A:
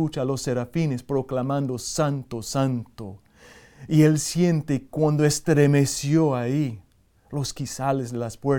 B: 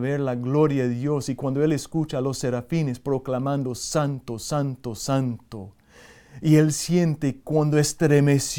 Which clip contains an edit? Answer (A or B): A